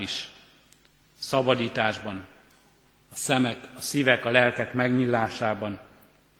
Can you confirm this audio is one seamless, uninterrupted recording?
yes; 0 cuts

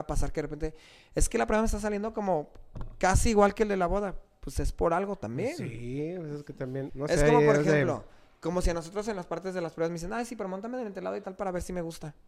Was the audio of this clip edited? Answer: yes; 2 cuts; at 6.9 s, 11.2 s

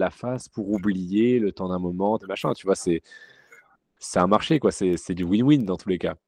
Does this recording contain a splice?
yes; 2 cuts; at 2.2 s, 5.0 s

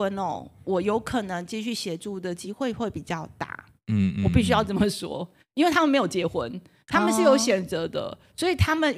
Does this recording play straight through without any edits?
yes; 0 cuts

